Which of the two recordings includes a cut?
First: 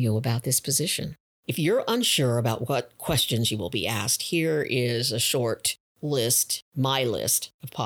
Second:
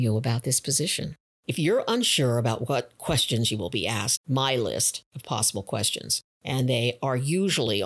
second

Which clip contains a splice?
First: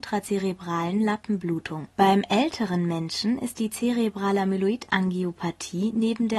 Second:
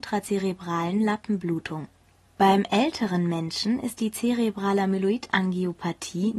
first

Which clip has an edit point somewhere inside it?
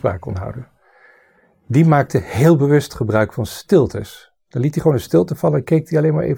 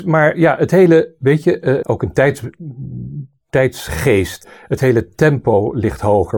second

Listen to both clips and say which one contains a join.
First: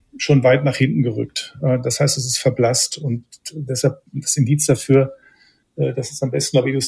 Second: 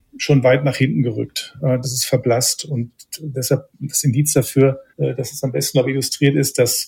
second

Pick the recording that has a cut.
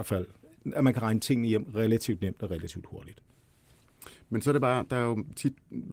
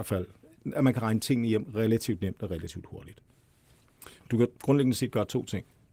second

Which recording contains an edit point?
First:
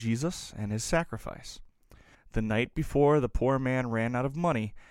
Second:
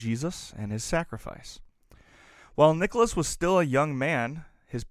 first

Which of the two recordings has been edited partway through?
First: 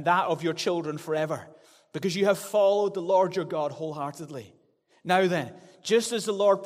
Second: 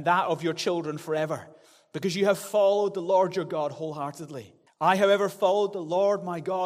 second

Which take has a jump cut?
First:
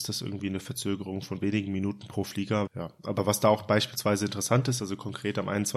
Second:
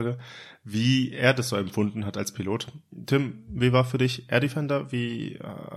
first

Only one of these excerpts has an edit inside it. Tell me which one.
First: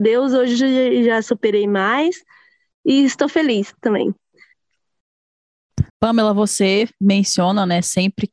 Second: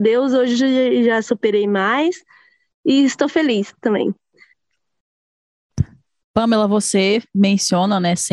first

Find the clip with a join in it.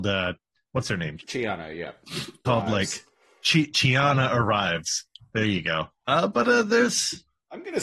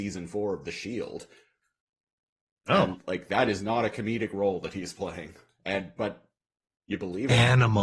first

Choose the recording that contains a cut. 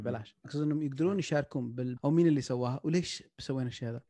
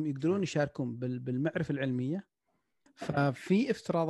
first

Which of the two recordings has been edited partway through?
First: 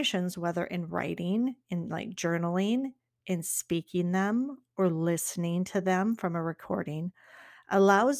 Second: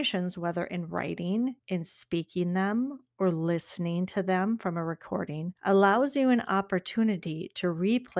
second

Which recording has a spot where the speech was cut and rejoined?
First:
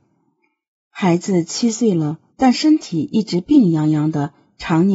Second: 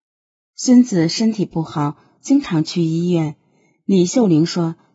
first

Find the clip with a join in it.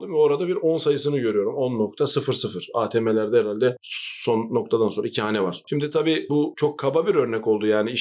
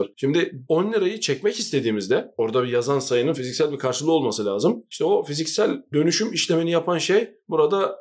first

